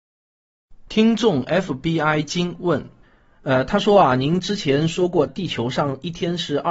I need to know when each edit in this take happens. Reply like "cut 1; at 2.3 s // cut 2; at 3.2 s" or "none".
cut 1; at 5.3 s